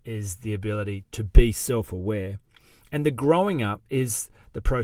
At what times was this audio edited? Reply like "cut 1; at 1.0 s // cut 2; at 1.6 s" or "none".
cut 1; at 1.0 s